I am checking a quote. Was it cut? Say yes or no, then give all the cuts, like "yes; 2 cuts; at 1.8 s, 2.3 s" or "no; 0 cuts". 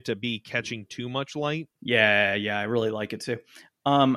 yes; 1 cut; at 1.8 s